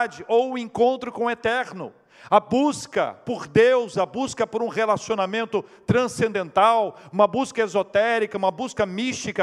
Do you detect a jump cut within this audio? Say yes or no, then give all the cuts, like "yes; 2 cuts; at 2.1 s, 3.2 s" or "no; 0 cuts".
no; 0 cuts